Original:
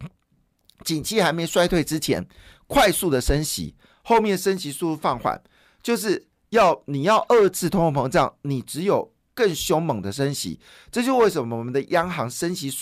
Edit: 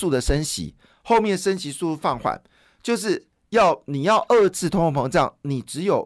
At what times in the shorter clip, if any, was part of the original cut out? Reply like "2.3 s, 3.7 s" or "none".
none